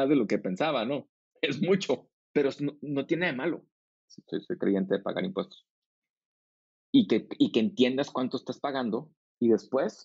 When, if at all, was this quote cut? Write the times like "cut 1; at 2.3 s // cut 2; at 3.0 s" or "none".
cut 1; at 3.9 s